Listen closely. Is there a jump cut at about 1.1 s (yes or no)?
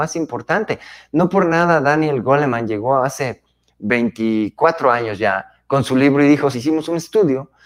no